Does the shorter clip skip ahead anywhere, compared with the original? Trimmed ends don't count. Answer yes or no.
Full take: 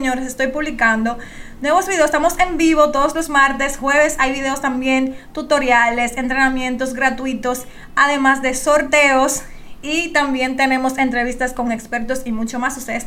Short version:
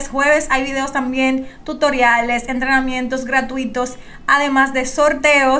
no